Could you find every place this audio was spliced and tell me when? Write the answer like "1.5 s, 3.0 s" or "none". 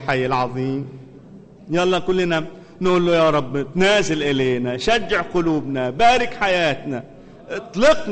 none